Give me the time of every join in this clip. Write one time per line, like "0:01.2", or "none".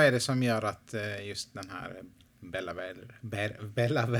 none